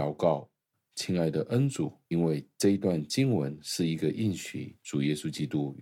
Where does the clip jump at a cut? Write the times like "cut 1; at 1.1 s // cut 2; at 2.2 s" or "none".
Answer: cut 1; at 2.1 s